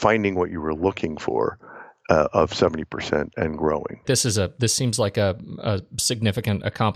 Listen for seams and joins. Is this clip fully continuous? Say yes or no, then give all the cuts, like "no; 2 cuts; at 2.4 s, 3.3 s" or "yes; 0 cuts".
no; 1 cut; at 4.0 s